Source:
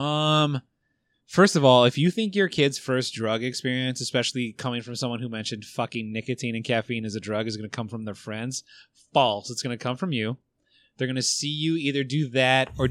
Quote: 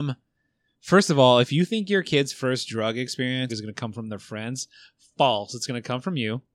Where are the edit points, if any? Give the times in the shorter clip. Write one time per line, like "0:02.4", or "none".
0:03.5